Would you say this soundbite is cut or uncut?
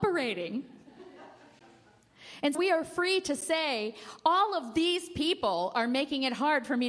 cut